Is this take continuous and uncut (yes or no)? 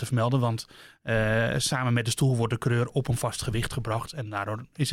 yes